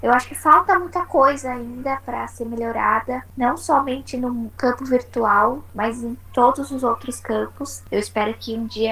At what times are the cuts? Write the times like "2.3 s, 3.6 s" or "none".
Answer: 7.9 s